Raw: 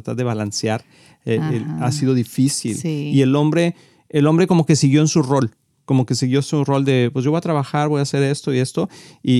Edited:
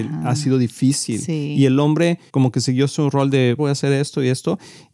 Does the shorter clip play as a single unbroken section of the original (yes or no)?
no